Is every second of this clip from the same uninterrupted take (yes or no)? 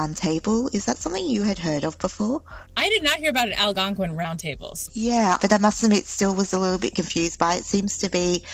no